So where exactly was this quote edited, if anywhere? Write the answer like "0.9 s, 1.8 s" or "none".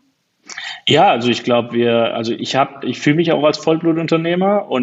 none